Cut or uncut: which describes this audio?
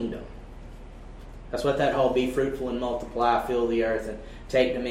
uncut